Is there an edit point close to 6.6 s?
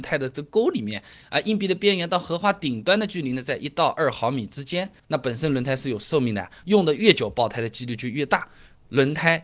yes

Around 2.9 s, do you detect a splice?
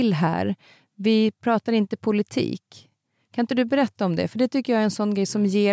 no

